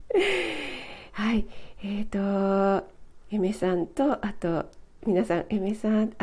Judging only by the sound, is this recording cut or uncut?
cut